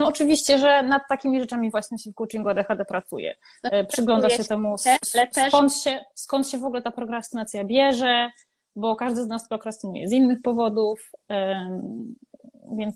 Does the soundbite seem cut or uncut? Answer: uncut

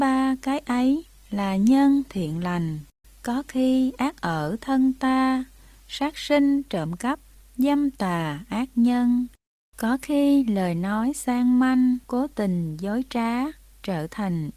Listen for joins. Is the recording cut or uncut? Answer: cut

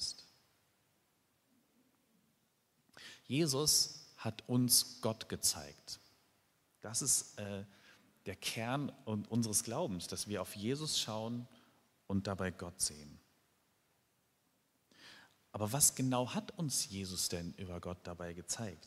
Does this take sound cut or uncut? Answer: uncut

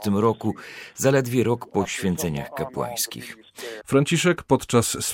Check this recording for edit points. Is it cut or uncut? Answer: cut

